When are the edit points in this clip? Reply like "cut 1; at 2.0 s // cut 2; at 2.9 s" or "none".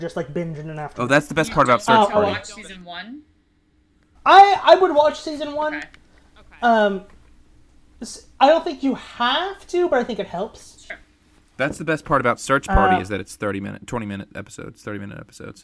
none